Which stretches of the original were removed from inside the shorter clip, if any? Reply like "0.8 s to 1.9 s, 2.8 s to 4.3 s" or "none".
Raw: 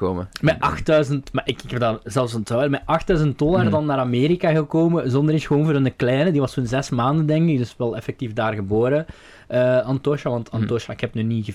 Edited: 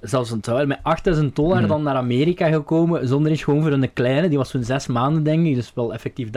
none